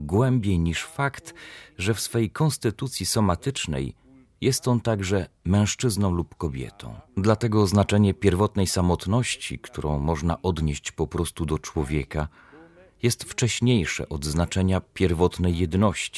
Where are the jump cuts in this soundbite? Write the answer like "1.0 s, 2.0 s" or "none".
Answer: 7.1 s